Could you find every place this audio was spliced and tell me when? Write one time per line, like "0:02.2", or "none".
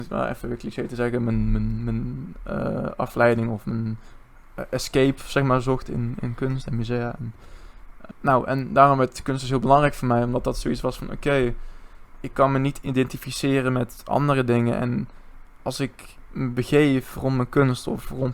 0:08.1

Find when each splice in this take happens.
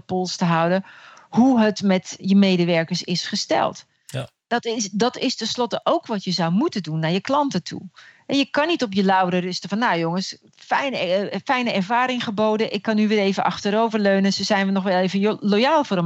none

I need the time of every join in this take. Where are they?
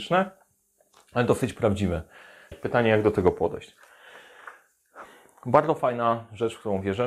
0:02.5

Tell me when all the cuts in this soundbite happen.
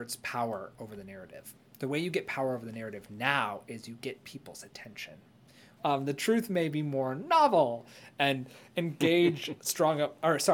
0:05.8

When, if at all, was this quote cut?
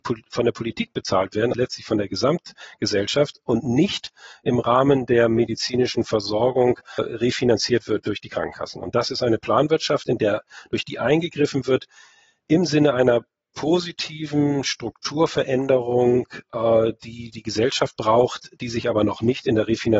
0:01.5

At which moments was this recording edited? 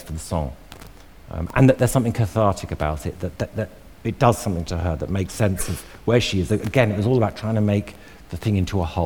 0:06.5

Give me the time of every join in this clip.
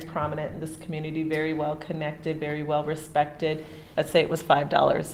0:03.9

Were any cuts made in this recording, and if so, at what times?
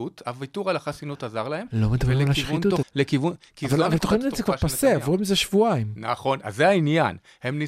0:02.8

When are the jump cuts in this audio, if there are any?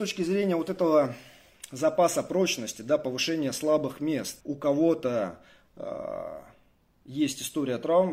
0:04.4

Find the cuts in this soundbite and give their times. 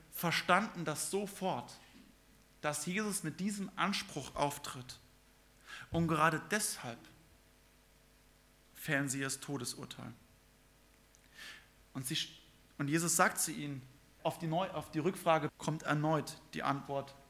0:14.2
0:15.5

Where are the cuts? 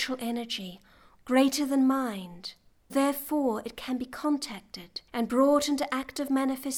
0:01.2
0:02.9
0:05.1

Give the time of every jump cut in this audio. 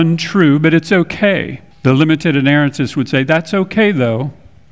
0:01.7

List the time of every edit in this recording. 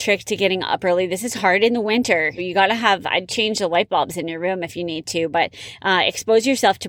0:02.4

